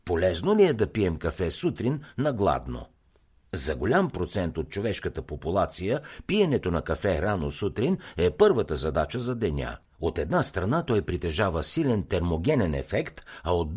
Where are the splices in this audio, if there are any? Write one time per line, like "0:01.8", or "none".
0:09.8